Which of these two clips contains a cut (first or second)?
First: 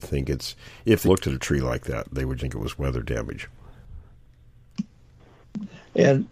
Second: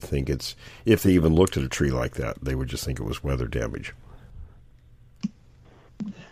first